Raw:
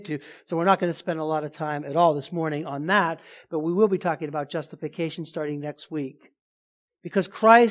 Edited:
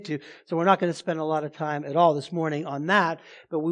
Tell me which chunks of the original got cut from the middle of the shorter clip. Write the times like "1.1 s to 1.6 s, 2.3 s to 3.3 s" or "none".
none